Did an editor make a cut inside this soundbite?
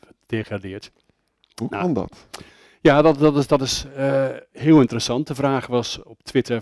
no; 0 cuts

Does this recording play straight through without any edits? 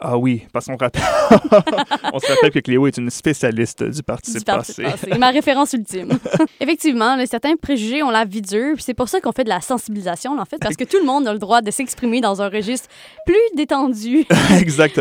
no; 2 cuts; at 6.5 s, 10.6 s

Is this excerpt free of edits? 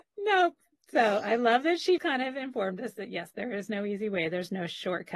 no; 1 cut; at 2.0 s

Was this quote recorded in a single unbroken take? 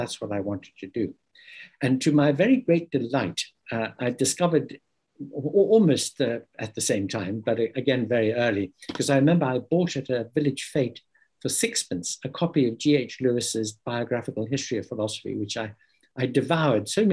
yes; 0 cuts

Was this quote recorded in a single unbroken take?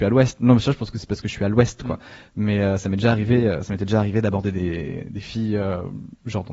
yes; 0 cuts

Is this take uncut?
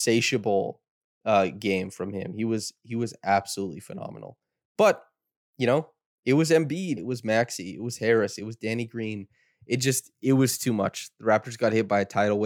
no; 1 cut; at 7.0 s

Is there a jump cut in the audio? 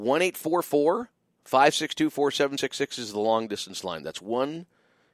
no; 0 cuts

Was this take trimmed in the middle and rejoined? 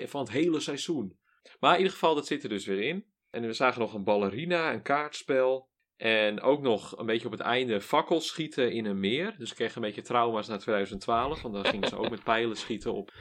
no; 0 cuts

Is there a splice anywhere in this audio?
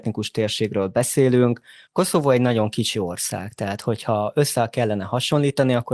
yes; 1 cut; at 1.9 s

